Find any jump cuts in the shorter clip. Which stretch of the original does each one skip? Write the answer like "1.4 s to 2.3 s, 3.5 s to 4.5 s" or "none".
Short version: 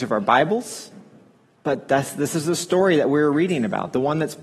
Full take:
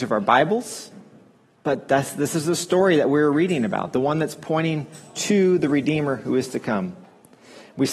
none